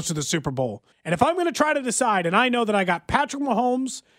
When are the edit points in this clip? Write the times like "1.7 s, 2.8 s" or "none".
0.9 s

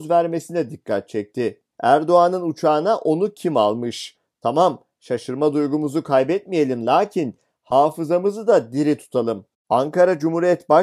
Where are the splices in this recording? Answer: 1.7 s

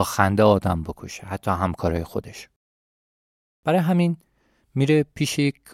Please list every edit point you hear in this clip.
none

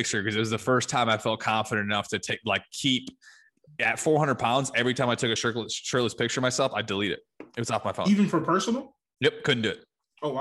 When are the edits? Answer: none

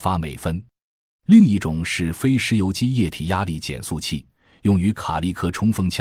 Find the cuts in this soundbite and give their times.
none

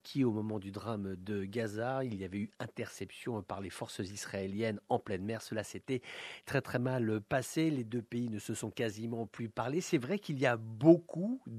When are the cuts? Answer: none

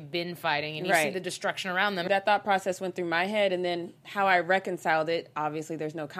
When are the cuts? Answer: 2.1 s

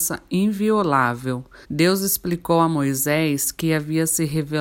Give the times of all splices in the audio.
1.6 s

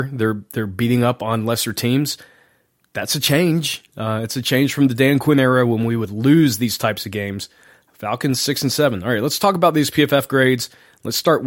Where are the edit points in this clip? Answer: none

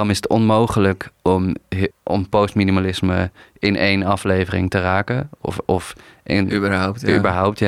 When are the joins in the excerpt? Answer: 1.9 s

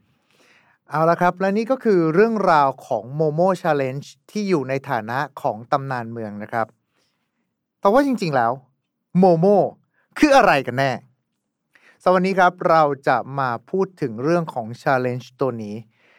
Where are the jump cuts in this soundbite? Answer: none

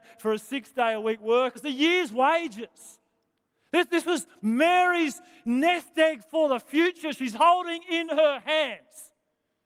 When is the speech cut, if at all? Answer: 1.5 s

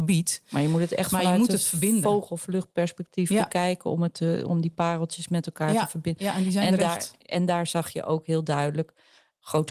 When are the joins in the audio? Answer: none

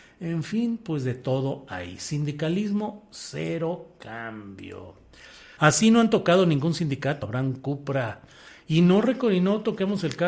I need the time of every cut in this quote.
5.6 s, 7.2 s

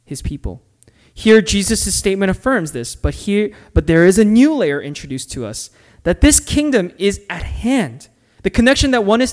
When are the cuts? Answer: 8.4 s

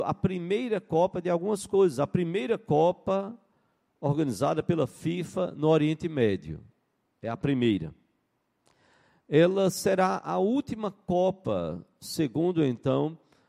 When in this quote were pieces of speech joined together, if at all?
none

